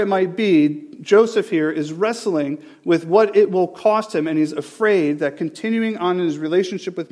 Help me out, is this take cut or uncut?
uncut